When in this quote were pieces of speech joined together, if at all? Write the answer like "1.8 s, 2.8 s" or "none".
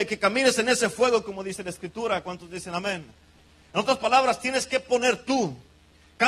none